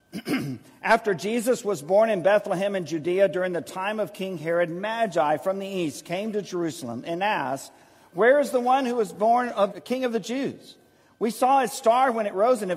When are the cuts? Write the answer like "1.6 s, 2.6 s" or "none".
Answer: 9.7 s